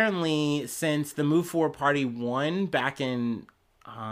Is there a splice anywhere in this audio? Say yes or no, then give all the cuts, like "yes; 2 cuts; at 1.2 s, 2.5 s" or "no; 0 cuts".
no; 0 cuts